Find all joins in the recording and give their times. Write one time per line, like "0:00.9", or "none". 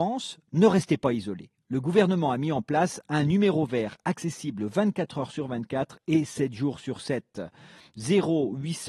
none